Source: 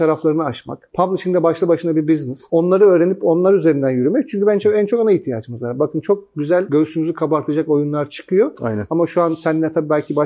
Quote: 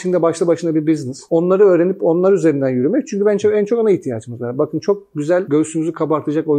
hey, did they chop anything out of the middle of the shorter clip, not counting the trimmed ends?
no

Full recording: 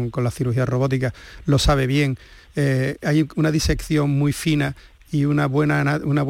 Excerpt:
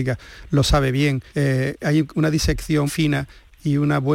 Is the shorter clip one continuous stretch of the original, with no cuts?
no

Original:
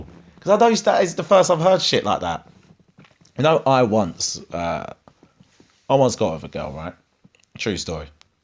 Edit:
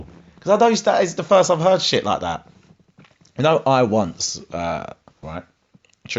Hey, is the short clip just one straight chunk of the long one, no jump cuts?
no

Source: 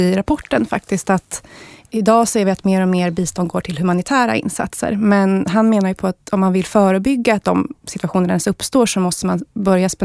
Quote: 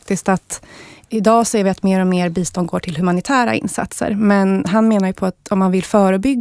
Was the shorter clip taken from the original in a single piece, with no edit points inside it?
yes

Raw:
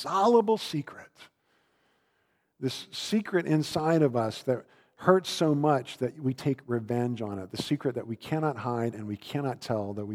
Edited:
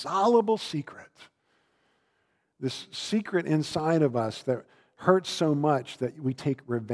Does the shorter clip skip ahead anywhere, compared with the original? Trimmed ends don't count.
no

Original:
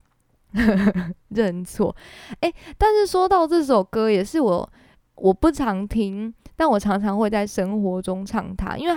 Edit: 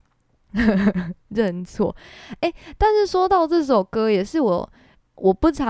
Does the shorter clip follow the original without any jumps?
yes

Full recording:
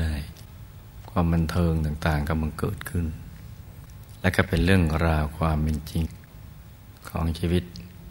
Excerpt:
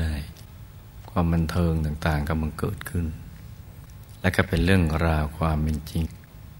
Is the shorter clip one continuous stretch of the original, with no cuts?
yes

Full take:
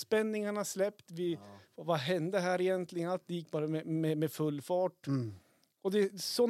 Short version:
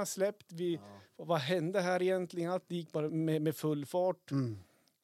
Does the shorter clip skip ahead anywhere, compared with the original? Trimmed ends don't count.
yes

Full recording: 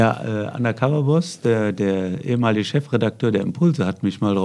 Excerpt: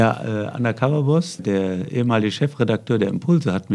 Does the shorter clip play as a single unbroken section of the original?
no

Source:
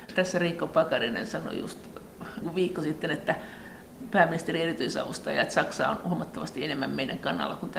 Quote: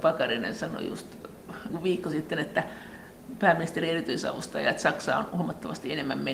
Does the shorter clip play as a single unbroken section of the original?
yes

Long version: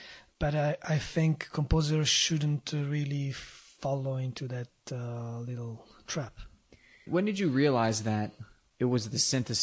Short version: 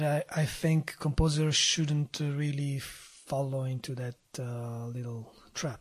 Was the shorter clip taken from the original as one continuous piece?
yes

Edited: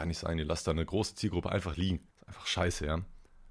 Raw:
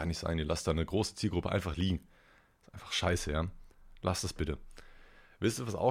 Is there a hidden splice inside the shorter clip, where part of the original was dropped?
yes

